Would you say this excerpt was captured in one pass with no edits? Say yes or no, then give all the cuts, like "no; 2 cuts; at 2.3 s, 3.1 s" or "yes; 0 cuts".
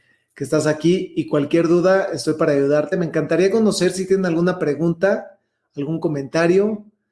yes; 0 cuts